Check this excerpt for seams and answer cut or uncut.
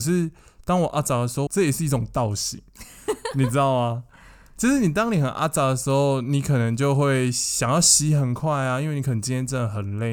cut